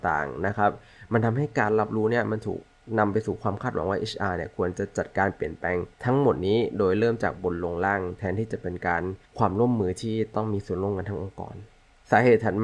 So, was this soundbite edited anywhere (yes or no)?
yes